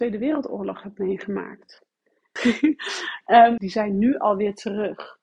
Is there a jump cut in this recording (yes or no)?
yes